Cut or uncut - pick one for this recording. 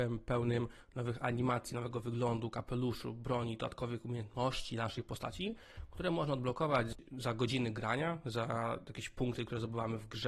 uncut